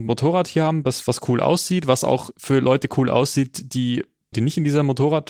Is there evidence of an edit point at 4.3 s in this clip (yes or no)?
yes